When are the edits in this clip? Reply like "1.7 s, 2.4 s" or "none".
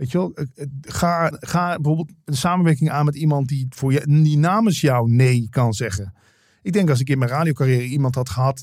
1.3 s